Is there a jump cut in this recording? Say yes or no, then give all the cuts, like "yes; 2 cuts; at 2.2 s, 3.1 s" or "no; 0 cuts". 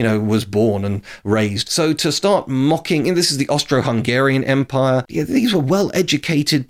yes; 1 cut; at 1.6 s